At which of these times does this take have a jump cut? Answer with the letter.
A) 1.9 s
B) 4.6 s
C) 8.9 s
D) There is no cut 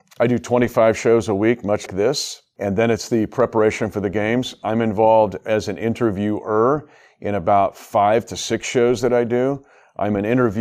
A